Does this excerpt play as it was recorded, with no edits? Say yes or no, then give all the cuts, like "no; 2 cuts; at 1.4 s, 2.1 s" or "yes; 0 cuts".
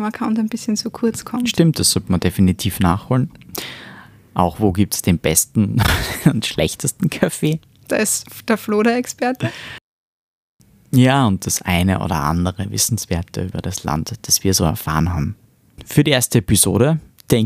yes; 0 cuts